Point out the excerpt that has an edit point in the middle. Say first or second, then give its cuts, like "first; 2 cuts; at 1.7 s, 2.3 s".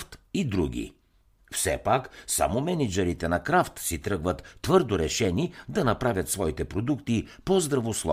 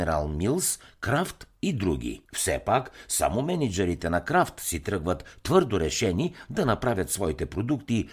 second; 1 cut; at 2.2 s